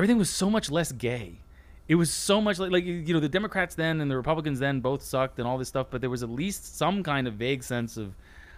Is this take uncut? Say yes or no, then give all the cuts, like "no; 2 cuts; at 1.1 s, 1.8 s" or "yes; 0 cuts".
yes; 0 cuts